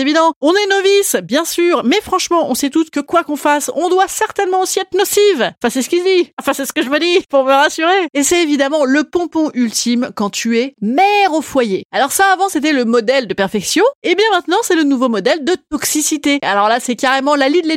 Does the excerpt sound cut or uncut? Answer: cut